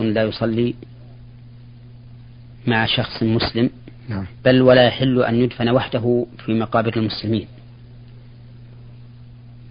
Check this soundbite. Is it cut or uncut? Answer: cut